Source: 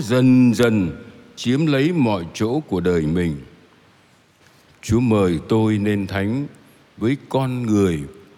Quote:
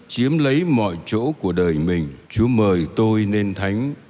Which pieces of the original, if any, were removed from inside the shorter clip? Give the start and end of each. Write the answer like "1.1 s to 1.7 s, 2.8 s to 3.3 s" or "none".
3.5 s to 4.8 s